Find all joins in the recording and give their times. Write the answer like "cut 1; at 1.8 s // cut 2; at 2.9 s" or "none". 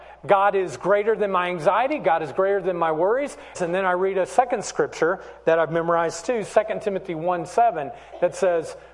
cut 1; at 3.5 s

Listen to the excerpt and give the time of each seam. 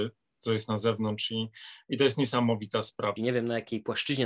cut 1; at 3.2 s

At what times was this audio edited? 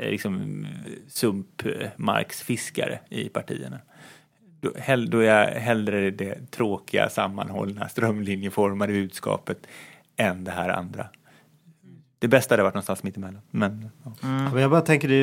none

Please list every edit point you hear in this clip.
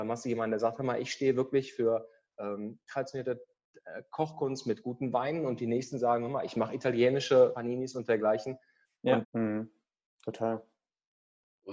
cut 1; at 7.5 s // cut 2; at 9.2 s

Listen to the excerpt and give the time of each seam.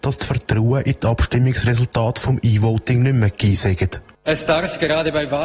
none

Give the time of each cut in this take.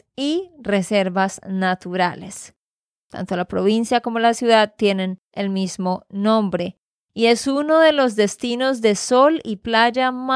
cut 1; at 2.9 s

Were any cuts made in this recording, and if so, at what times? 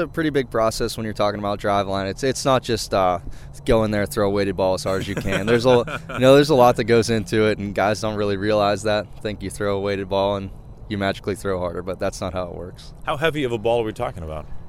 none

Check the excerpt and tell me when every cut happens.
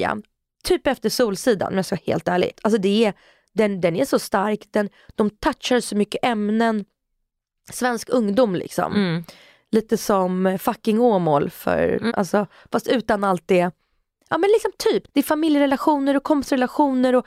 cut 1; at 2.5 s // cut 2; at 12.1 s // cut 3; at 15.1 s

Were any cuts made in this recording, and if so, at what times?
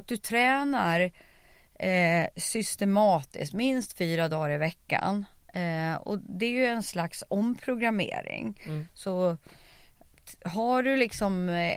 none

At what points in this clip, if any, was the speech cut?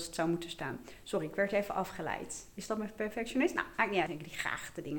cut 1; at 4.1 s

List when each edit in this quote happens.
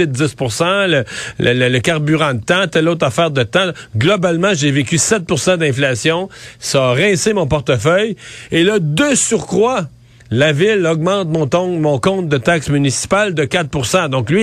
none

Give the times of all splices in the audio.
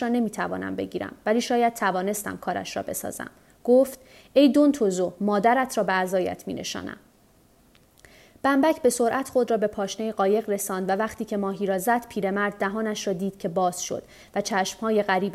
none

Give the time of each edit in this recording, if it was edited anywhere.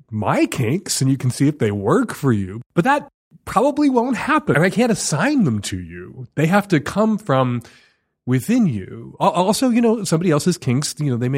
cut 1; at 4.5 s

